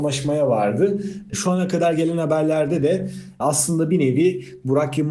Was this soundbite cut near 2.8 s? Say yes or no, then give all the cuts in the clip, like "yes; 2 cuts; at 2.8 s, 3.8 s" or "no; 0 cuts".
no; 1 cut; at 1.3 s